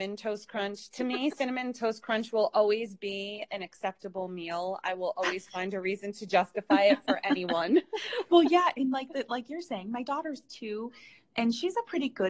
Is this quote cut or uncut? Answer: uncut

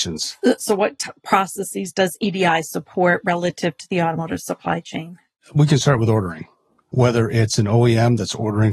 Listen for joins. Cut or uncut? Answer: uncut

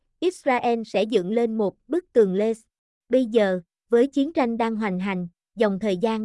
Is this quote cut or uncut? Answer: cut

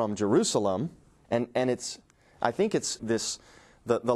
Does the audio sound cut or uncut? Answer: cut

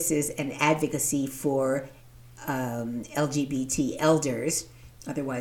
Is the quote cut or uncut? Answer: uncut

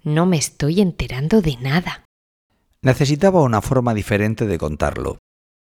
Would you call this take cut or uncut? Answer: uncut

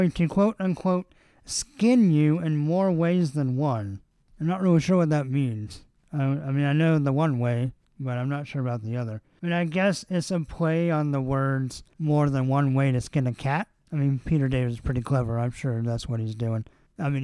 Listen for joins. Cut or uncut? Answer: uncut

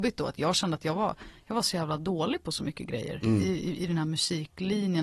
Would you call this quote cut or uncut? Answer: uncut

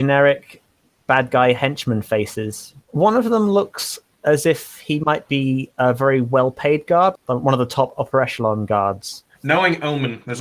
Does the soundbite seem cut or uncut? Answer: cut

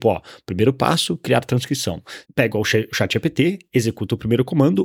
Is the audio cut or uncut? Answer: cut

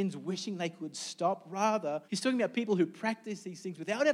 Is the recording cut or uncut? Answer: cut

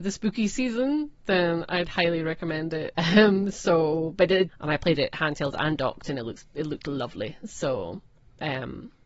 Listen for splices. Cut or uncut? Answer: cut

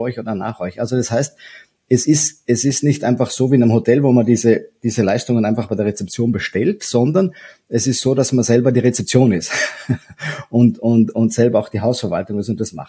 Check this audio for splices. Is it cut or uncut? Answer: uncut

